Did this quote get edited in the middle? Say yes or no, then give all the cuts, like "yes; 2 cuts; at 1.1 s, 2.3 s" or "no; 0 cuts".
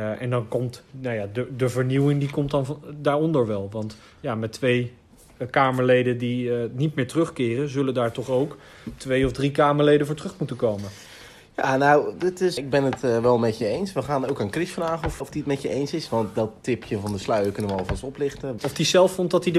yes; 3 cuts; at 12.6 s, 15.2 s, 18.6 s